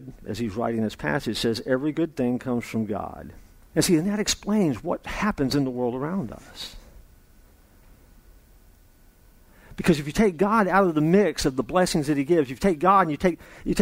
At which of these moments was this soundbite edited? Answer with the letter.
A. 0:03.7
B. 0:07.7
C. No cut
A